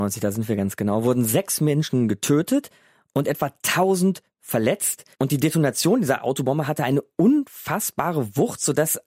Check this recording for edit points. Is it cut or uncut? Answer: cut